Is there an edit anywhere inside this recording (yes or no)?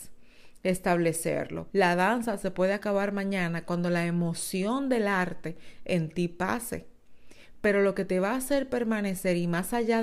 yes